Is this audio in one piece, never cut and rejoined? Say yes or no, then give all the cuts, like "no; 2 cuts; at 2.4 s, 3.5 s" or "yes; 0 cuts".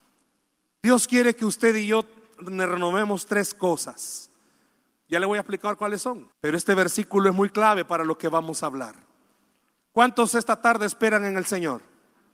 no; 1 cut; at 6.3 s